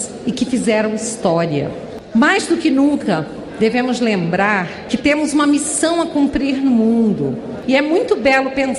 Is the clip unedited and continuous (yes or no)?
yes